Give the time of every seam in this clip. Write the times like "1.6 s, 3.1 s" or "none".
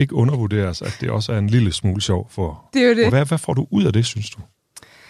3.1 s